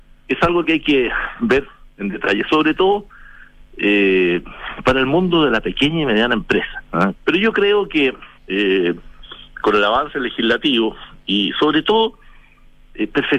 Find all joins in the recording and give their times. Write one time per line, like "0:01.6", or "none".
0:07.1
0:08.4